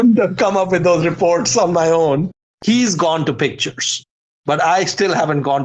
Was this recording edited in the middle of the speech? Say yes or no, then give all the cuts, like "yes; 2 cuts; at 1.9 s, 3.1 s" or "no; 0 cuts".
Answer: yes; 1 cut; at 2.6 s